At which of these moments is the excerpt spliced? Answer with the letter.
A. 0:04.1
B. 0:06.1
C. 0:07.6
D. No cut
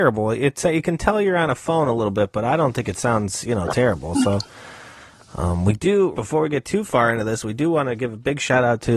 B